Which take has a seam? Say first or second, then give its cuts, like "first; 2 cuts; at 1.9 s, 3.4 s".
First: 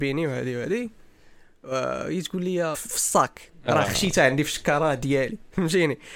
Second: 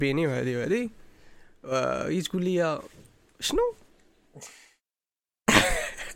first; 1 cut; at 2.7 s